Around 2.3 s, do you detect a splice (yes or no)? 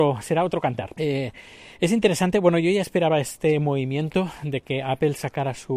no